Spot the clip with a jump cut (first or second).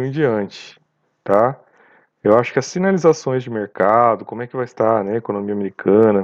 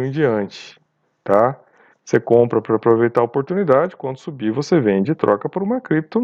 second